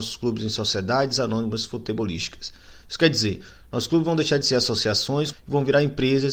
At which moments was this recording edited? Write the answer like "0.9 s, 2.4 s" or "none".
5.3 s